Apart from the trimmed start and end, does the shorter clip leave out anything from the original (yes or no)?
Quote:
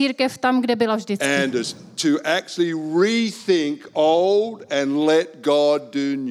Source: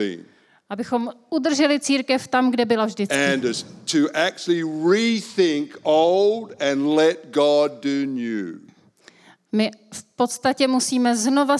no